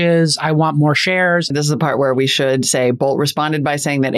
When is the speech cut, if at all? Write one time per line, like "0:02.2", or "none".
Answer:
0:01.5